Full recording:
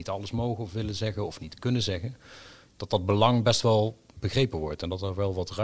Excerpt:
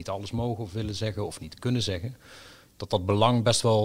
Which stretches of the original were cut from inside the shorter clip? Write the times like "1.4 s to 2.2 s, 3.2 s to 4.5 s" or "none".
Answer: none